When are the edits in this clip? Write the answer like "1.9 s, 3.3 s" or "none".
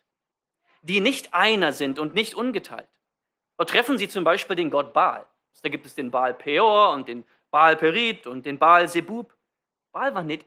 5.5 s